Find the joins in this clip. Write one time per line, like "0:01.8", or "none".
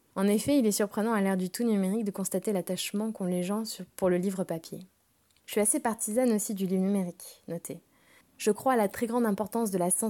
0:08.2